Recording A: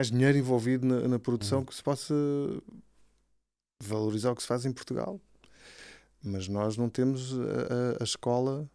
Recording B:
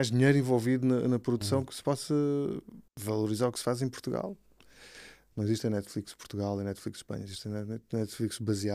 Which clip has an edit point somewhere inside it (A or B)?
B